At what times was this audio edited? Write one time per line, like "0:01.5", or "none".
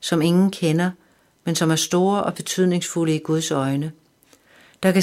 none